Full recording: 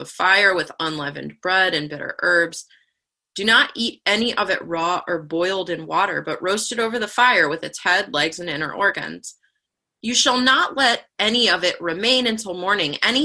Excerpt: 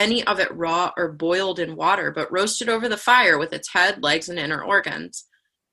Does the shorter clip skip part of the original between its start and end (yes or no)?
no